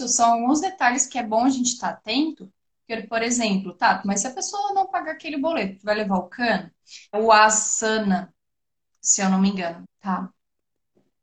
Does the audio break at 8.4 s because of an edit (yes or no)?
no